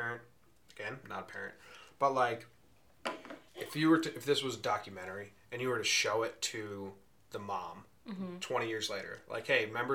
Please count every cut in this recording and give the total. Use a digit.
2